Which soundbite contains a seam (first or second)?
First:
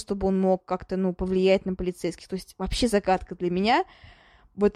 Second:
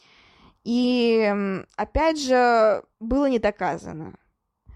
second